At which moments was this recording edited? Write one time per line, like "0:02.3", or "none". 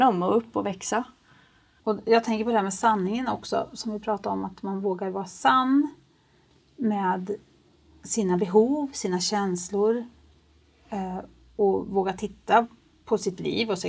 0:01.8